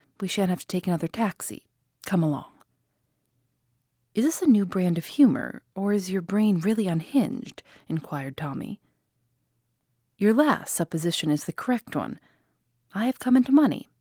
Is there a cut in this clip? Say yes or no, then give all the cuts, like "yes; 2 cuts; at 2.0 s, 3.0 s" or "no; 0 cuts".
no; 0 cuts